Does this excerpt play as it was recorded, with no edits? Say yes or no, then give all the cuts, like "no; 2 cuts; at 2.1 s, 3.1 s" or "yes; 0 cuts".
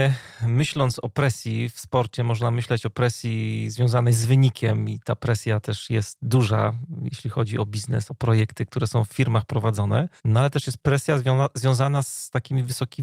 no; 2 cuts; at 8.1 s, 10.2 s